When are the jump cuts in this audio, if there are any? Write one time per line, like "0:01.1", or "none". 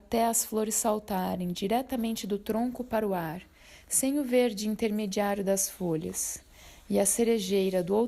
none